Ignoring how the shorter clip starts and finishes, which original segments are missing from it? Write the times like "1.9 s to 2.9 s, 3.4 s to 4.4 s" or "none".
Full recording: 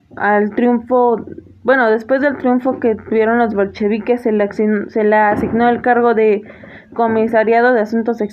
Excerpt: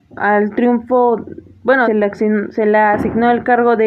1.8 s to 4.2 s